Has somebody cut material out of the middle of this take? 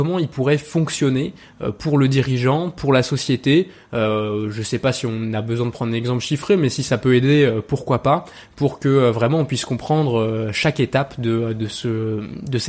no; 0 cuts

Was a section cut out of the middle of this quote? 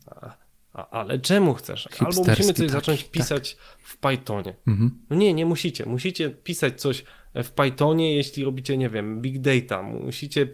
yes; 1 cut; at 1.9 s

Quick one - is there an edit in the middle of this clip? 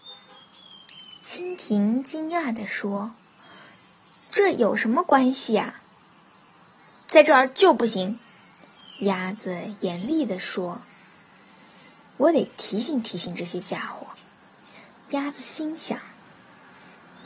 no; 0 cuts

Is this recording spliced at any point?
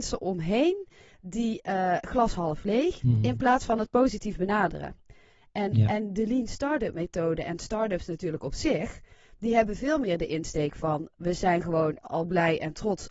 yes; 1 cut; at 3.0 s

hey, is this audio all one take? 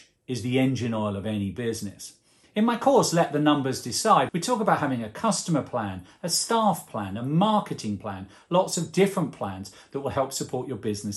no; 1 cut; at 4.3 s

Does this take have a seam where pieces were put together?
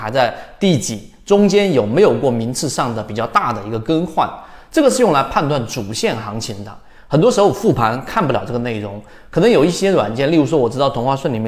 no; 0 cuts

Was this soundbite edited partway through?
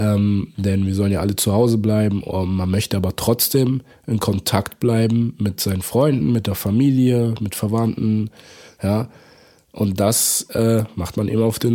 no; 0 cuts

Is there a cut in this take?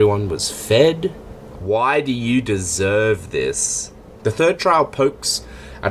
yes; 2 cuts; at 1.5 s, 4.2 s

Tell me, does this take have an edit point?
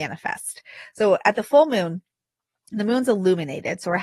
no; 0 cuts

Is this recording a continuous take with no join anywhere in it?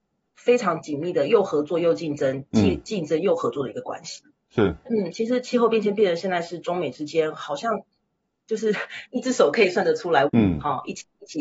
no; 2 cuts; at 4.9 s, 10.3 s

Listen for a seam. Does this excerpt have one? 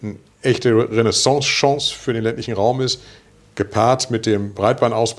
no; 0 cuts

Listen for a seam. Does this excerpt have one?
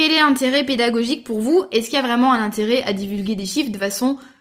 no; 0 cuts

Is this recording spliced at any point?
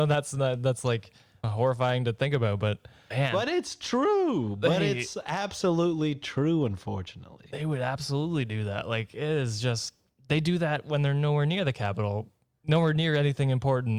no; 0 cuts

